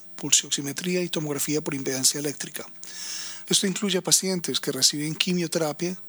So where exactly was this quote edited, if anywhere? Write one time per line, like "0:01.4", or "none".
0:03.5